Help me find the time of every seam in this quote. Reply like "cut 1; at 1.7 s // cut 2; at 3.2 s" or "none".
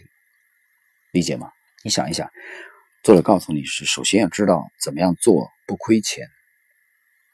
cut 1; at 1.7 s